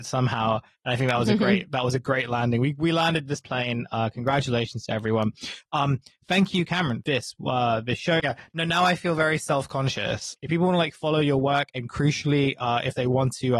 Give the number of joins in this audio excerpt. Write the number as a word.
three